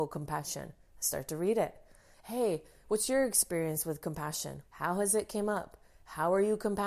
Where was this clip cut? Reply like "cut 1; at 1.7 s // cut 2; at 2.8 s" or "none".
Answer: cut 1; at 2.1 s // cut 2; at 4.6 s